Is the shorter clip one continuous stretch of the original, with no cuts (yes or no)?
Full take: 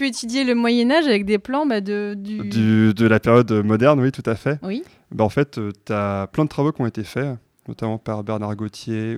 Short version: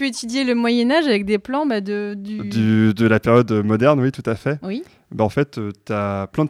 yes